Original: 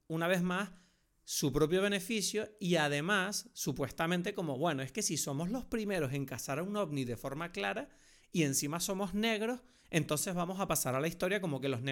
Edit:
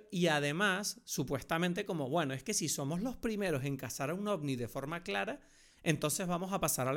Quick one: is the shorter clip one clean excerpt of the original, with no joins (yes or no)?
no